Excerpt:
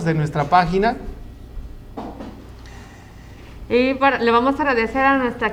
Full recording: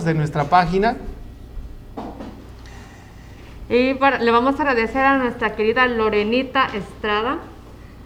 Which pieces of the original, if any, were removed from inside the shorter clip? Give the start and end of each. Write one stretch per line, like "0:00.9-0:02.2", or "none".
none

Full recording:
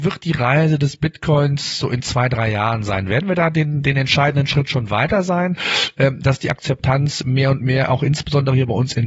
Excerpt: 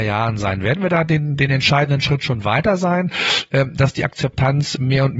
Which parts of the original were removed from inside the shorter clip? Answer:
none

